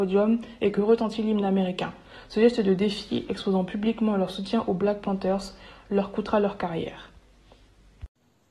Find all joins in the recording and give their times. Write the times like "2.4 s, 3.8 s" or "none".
none